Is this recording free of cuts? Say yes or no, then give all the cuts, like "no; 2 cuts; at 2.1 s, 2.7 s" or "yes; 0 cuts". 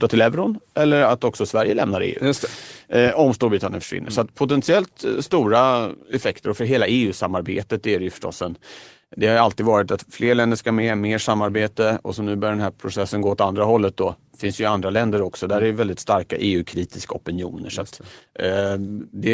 yes; 0 cuts